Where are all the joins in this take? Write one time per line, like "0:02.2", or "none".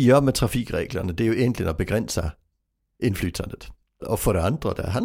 0:04.0